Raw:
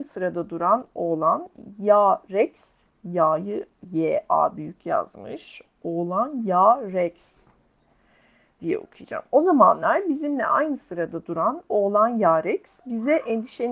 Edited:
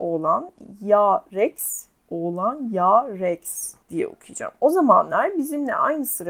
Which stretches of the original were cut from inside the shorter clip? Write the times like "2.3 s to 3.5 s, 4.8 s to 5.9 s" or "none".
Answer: 3.0 s to 5.7 s, 7.6 s to 8.5 s